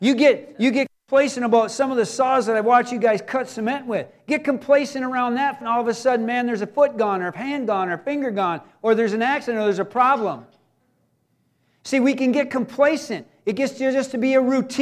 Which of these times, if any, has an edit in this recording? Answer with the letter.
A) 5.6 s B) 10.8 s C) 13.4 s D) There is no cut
A